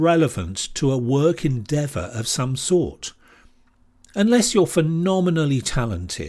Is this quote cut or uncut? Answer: cut